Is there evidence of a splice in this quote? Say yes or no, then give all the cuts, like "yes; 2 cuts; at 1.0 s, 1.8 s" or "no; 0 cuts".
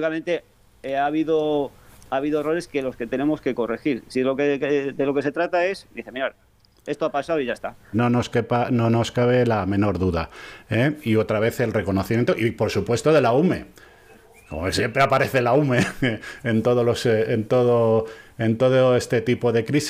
yes; 1 cut; at 7.9 s